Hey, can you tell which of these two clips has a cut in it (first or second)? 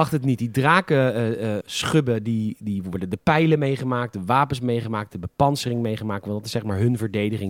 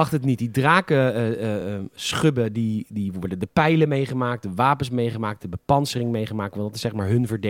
first